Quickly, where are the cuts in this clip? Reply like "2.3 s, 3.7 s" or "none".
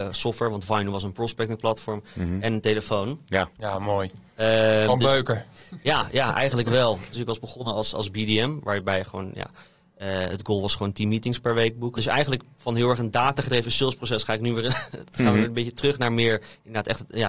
7.1 s, 12.0 s